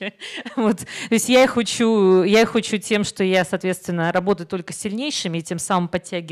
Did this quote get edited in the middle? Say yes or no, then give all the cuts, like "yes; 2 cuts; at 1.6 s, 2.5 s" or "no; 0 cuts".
no; 0 cuts